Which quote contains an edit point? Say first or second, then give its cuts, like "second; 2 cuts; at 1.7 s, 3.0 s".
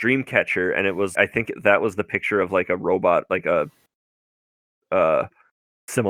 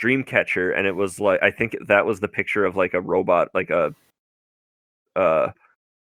first; 1 cut; at 1.2 s